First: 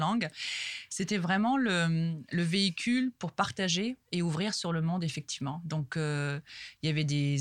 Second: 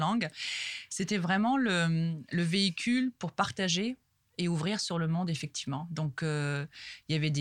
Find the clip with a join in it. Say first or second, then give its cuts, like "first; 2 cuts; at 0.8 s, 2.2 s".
first; 1 cut; at 4.0 s